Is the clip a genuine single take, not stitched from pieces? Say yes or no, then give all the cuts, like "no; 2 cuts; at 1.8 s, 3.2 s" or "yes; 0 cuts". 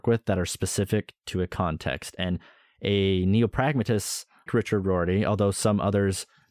no; 1 cut; at 4.5 s